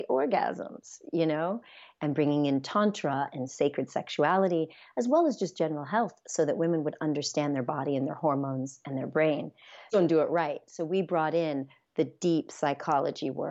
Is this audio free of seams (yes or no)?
no